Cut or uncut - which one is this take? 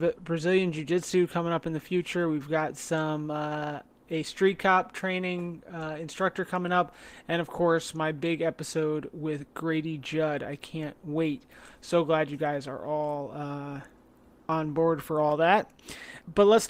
uncut